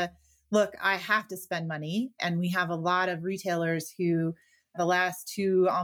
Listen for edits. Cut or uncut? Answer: uncut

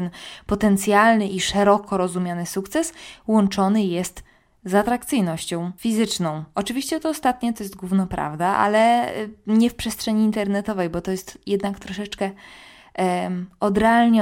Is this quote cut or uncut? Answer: uncut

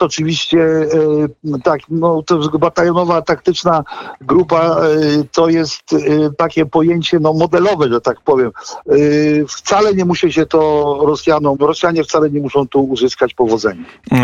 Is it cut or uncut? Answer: cut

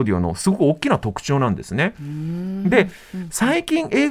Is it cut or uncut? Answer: uncut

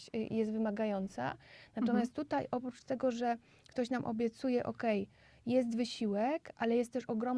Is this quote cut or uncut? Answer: uncut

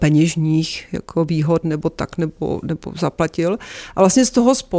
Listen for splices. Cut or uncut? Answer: uncut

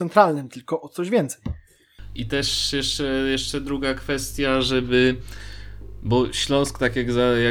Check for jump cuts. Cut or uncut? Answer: cut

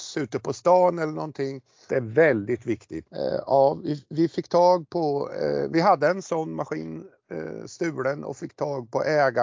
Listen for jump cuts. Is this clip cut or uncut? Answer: cut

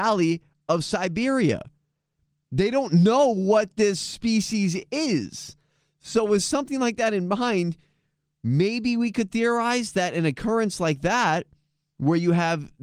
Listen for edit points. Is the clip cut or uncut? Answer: uncut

